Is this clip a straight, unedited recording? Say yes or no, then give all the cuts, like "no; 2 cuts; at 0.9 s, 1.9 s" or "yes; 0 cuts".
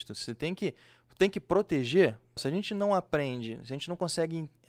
no; 1 cut; at 2.4 s